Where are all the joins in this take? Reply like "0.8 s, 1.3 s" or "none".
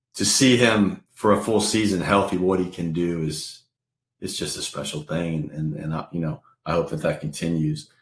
none